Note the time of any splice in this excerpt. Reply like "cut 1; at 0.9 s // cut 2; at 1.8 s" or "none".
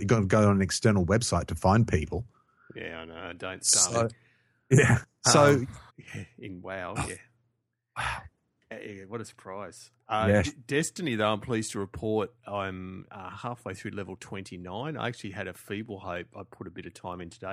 cut 1; at 5.9 s

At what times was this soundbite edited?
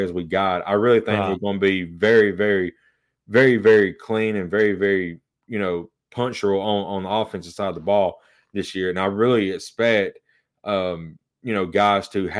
none

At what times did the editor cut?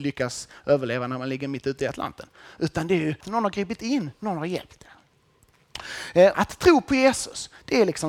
cut 1; at 3.2 s // cut 2; at 6.3 s

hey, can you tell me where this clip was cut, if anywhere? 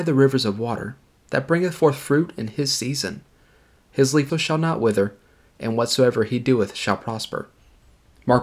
cut 1; at 4.3 s

